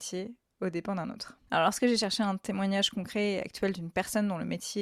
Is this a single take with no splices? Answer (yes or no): no